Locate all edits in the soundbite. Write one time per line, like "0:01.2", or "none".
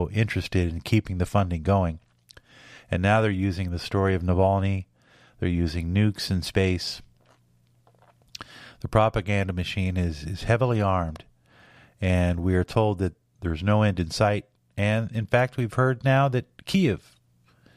none

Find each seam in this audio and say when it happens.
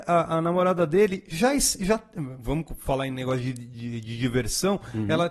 none

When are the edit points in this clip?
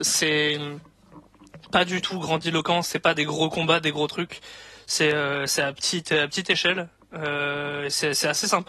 none

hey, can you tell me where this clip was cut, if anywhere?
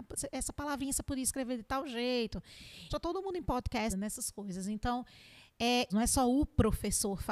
0:02.9
0:03.9
0:05.9

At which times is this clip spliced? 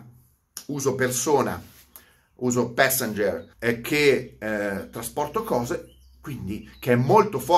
0:03.5

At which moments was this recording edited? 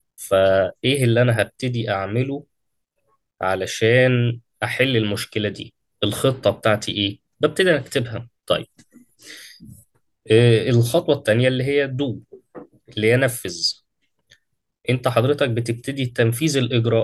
0:08.4

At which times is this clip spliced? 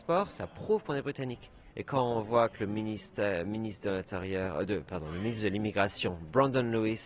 0:01.7

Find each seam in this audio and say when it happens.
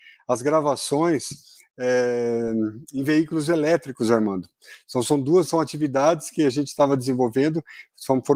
none

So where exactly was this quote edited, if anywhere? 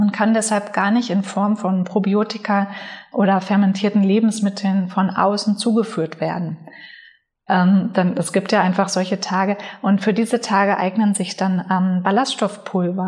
0:07.5

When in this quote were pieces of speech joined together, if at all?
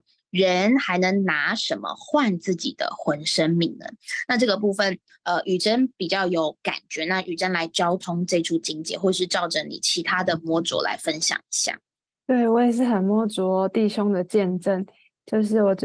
none

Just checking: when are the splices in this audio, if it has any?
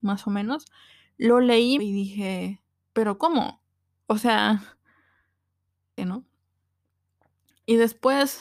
0:01.8
0:06.0

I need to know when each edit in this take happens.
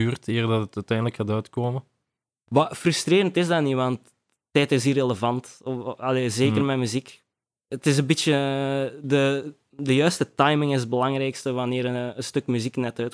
none

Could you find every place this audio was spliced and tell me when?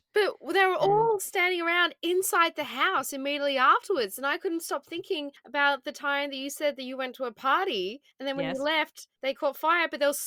none

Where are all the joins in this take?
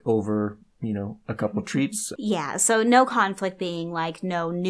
0:02.2

